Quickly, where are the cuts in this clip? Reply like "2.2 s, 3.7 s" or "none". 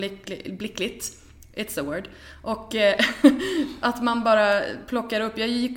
3.8 s